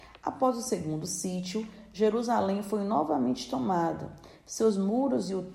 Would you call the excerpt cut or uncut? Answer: uncut